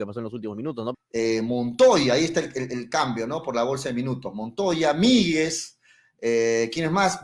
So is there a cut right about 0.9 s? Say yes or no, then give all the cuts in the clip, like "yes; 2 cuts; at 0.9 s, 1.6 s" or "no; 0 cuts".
yes; 1 cut; at 0.9 s